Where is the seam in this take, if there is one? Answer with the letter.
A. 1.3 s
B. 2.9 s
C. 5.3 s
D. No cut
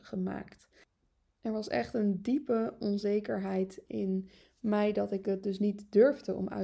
D